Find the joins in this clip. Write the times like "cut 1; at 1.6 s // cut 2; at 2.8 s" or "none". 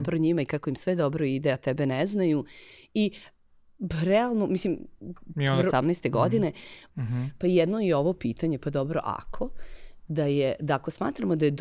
cut 1; at 5.7 s // cut 2; at 6.9 s // cut 3; at 10.1 s